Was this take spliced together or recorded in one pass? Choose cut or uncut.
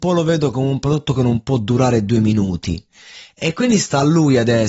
uncut